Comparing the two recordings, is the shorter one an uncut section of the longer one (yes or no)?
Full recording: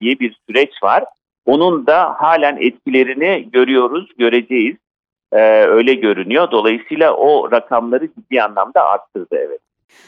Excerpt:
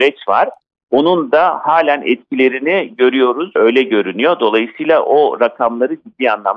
no